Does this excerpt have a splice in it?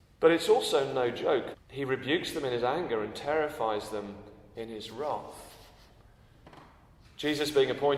yes; 1 cut; at 1.5 s

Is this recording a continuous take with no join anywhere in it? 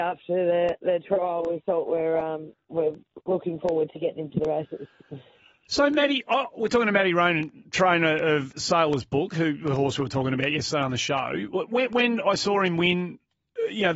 yes; 0 cuts

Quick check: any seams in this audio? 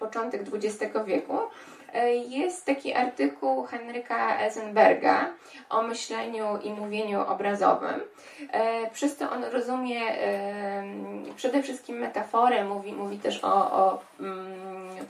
no; 0 cuts

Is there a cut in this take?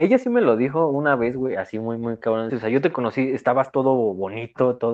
yes; 1 cut; at 2.5 s

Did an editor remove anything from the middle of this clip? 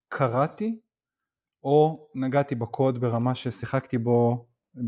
no; 0 cuts

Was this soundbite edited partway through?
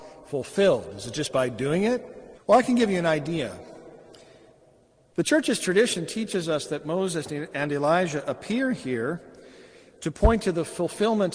yes; 2 cuts; at 2.3 s, 5.1 s

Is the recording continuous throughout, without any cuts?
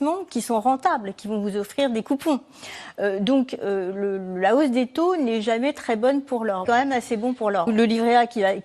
no; 2 cuts; at 6.6 s, 7.7 s

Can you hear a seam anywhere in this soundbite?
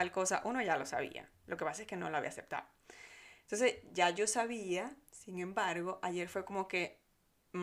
no; 0 cuts

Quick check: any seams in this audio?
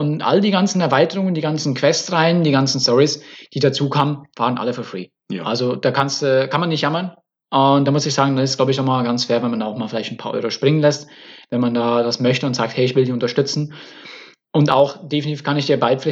no; 0 cuts

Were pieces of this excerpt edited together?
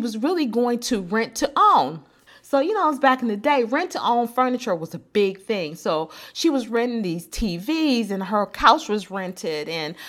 no; 0 cuts

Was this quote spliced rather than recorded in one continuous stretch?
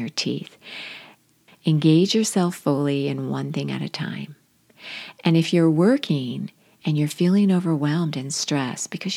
yes; 1 cut; at 1.5 s

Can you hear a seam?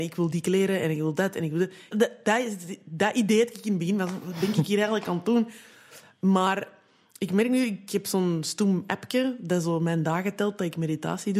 yes; 1 cut; at 1.9 s

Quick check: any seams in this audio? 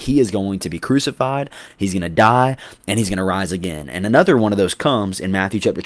no; 0 cuts

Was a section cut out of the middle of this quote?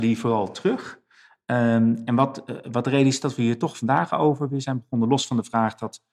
no; 0 cuts

